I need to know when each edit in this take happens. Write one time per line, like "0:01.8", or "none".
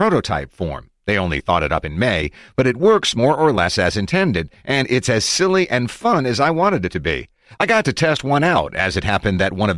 none